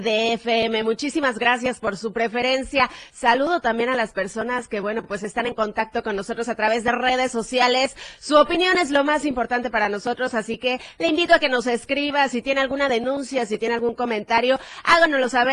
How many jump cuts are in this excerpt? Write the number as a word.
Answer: zero